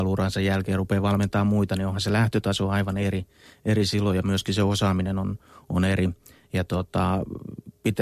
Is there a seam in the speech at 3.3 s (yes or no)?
no